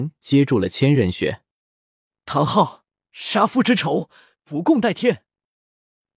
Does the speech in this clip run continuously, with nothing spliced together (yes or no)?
yes